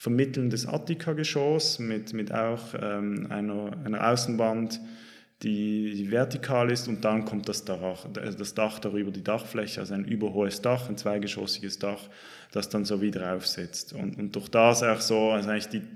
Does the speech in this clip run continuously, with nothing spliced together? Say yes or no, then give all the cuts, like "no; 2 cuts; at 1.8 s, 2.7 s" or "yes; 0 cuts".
yes; 0 cuts